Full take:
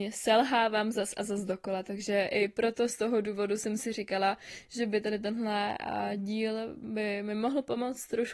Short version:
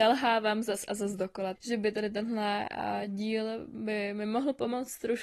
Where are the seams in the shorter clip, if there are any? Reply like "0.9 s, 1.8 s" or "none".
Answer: 1.5 s